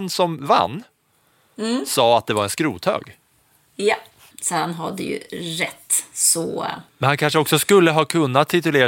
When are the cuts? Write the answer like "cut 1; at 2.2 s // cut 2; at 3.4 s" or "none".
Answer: cut 1; at 4.3 s // cut 2; at 6.9 s